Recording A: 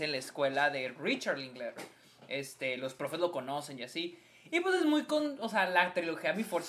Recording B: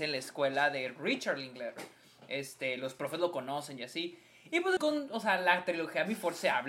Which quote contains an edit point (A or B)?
B